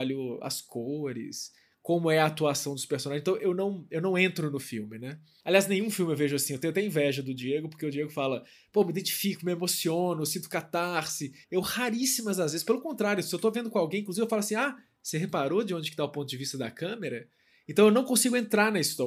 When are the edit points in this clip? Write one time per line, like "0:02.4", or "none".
0:11.4